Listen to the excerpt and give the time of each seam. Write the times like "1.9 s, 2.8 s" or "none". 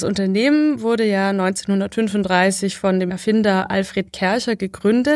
none